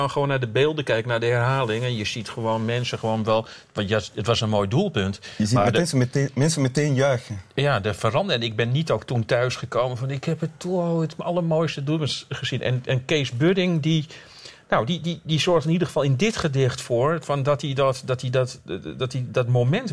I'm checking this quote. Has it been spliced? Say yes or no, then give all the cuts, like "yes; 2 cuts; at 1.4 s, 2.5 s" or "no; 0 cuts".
no; 0 cuts